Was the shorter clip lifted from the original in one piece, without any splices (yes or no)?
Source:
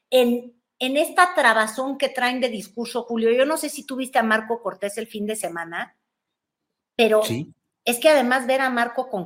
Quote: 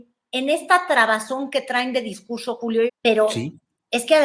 no